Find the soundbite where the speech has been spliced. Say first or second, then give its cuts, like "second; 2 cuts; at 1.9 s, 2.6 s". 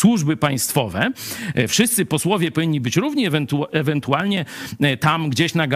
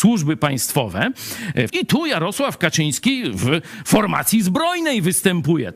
second; 1 cut; at 1.7 s